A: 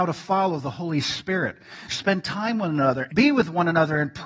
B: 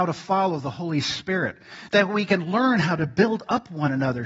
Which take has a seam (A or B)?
A